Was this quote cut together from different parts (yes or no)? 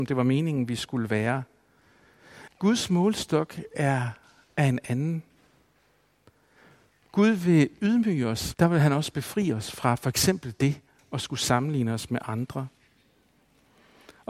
yes